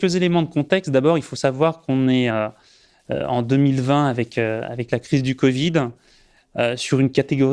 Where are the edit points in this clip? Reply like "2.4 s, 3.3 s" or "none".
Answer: none